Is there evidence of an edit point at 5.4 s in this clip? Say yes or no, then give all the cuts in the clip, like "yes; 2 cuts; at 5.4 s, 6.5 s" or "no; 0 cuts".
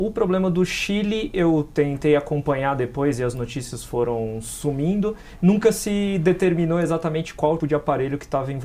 no; 1 cut; at 7.6 s